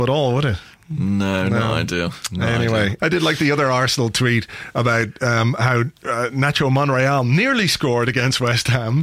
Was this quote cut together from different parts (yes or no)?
yes